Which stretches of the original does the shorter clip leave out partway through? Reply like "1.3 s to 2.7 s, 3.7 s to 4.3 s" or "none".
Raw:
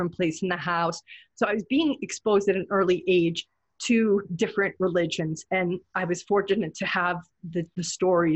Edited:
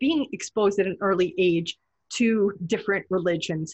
none